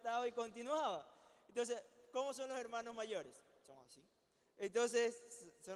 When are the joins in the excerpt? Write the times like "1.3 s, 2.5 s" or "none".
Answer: none